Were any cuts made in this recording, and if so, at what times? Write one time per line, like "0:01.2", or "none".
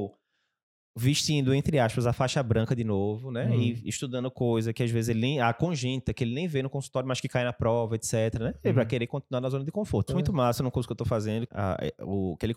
0:10.1
0:11.5